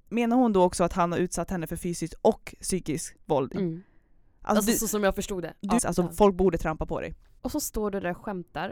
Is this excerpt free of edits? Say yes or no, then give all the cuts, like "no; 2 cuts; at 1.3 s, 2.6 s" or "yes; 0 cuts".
no; 3 cuts; at 3.6 s, 5.8 s, 7.4 s